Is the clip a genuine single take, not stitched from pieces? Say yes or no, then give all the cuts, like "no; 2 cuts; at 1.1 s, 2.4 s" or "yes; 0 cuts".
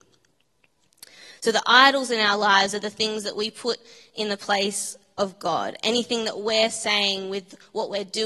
yes; 0 cuts